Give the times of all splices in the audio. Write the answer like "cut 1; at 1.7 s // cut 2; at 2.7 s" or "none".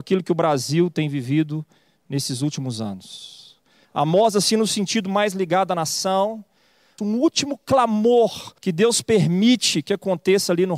cut 1; at 3.8 s // cut 2; at 7.0 s // cut 3; at 8.6 s